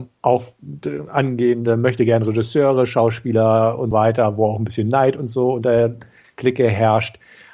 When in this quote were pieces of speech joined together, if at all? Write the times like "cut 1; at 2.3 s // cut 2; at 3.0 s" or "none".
cut 1; at 3.9 s